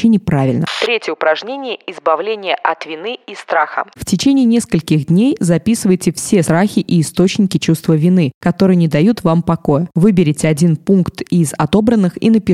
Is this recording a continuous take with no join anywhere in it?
no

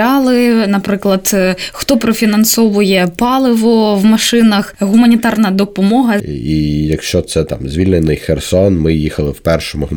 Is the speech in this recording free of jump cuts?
no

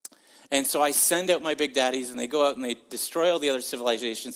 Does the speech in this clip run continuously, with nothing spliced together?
yes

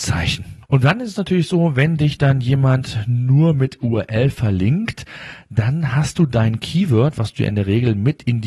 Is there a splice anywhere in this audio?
no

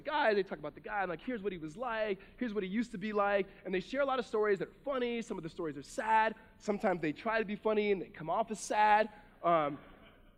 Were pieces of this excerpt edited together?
no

